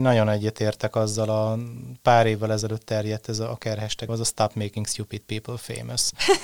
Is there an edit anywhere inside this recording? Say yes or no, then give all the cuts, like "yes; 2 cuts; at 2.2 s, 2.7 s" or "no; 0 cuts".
yes; 1 cut; at 4.1 s